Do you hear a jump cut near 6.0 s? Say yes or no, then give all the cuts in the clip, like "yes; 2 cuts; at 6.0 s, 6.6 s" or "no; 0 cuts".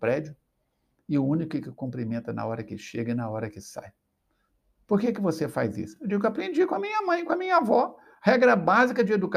no; 0 cuts